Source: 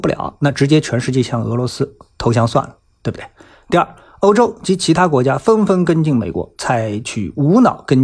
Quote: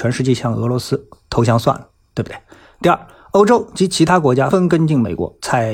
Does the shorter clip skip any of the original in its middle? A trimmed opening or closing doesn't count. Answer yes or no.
yes